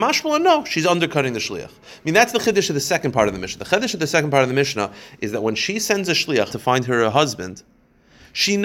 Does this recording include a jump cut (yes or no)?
yes